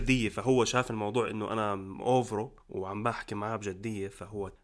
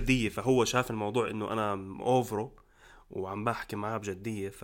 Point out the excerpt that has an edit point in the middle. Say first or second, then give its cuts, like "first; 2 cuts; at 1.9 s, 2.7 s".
first; 1 cut; at 2.6 s